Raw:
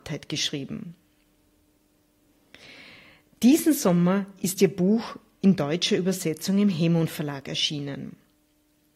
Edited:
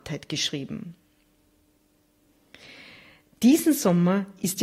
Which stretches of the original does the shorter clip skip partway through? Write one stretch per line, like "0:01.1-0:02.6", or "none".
none